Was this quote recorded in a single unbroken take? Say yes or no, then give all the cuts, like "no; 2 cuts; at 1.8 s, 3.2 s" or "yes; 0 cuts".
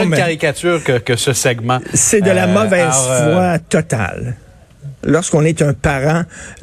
no; 1 cut; at 5.0 s